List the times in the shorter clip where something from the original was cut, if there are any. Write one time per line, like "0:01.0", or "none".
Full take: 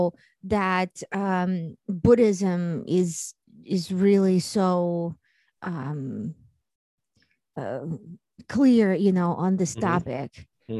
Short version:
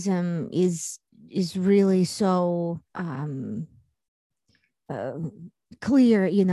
0:02.8